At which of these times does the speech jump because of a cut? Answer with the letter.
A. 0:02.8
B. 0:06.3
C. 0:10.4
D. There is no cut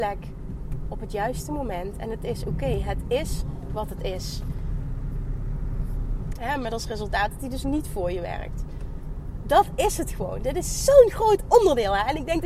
B